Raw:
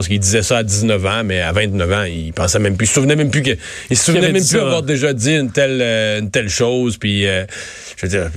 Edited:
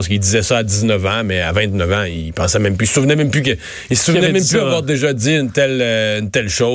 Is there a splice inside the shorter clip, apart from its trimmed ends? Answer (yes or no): no